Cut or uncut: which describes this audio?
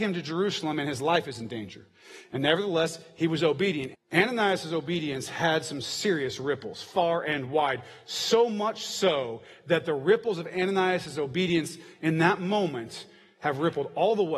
cut